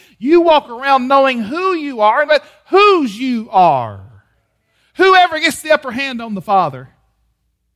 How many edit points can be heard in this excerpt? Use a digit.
1